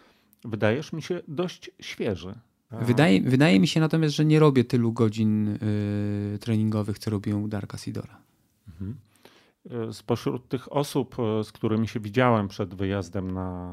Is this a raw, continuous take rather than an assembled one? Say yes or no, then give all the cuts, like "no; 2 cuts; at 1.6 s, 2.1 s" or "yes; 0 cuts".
no; 1 cut; at 2.7 s